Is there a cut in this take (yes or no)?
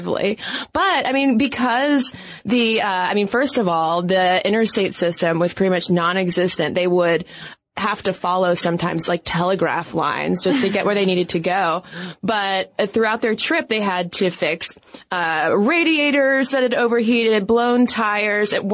no